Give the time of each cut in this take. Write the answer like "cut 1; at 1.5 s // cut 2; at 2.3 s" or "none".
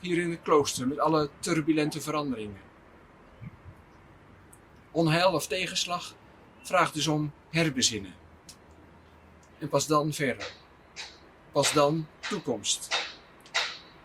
cut 1; at 9.5 s